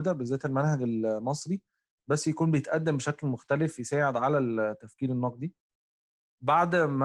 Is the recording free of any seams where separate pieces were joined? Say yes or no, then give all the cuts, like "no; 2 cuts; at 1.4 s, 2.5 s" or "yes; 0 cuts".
yes; 0 cuts